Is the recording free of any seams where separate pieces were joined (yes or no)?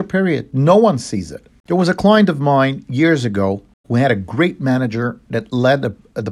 no